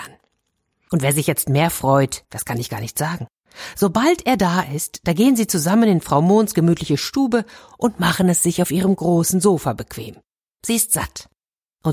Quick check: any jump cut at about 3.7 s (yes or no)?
no